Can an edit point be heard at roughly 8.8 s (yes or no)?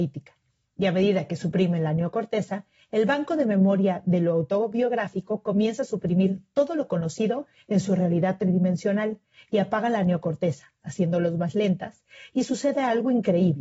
no